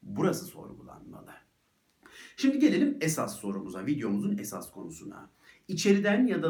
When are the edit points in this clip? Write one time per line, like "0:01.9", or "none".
none